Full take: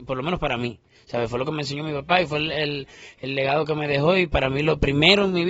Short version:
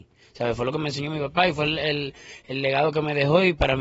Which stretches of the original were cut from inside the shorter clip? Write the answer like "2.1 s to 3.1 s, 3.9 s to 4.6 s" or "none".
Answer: none